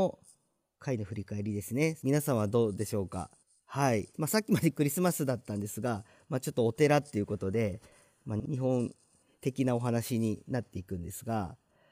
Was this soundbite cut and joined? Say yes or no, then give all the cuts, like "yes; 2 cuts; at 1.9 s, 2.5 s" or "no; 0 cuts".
yes; 2 cuts; at 2.0 s, 4.1 s